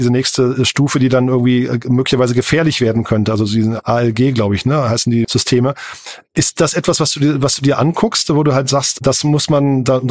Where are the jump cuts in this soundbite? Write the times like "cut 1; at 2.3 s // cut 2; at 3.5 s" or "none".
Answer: cut 1; at 5.2 s